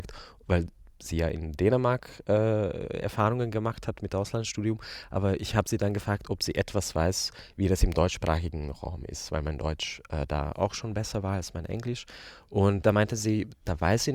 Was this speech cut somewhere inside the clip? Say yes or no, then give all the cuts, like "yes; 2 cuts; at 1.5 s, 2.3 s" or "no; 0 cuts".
no; 0 cuts